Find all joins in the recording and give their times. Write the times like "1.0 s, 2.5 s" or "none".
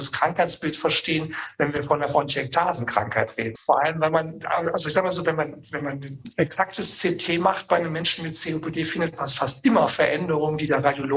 3.5 s